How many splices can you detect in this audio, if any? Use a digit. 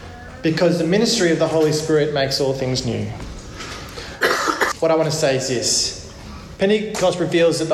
1